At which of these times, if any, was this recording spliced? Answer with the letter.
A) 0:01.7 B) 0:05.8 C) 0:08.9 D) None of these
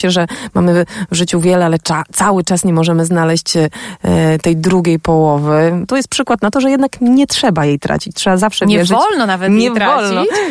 B